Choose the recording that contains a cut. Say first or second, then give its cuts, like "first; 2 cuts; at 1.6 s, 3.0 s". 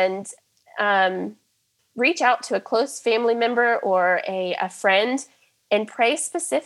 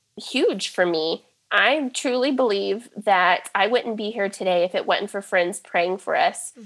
first; 1 cut; at 1.8 s